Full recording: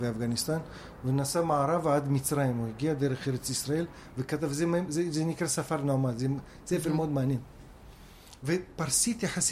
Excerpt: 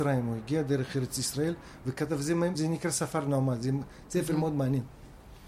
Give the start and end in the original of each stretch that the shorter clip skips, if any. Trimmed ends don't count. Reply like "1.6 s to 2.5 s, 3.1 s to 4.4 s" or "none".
4.9 s to 5.1 s